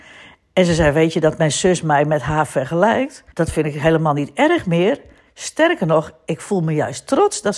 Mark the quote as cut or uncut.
cut